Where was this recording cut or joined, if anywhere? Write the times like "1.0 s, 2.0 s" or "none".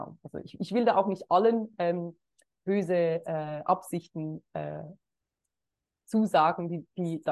none